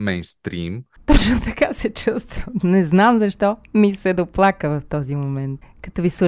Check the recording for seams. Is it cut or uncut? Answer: cut